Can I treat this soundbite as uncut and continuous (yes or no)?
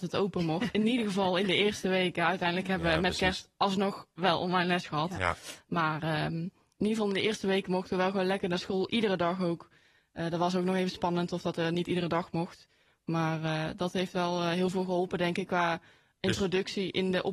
yes